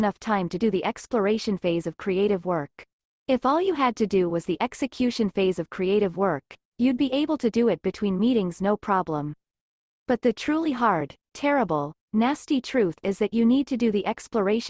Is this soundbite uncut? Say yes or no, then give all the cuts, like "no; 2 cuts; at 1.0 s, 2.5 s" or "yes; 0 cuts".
no; 1 cut; at 3.1 s